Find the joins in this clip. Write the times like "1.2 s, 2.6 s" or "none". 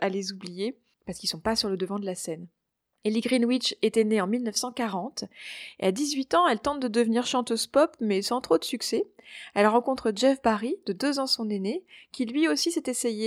none